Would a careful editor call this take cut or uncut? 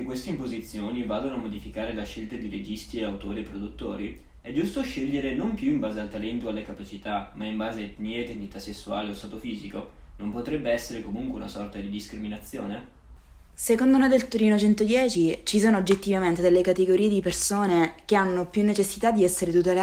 uncut